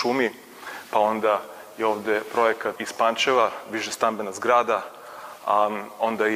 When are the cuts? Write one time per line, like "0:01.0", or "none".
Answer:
0:02.8